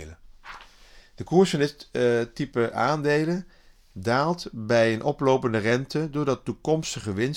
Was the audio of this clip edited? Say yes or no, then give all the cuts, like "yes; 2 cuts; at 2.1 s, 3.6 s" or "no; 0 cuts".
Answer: no; 0 cuts